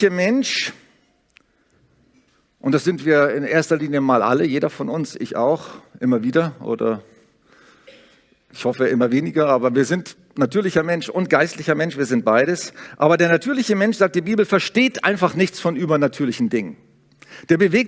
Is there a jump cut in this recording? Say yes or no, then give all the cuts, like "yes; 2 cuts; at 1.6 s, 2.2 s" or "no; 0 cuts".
no; 0 cuts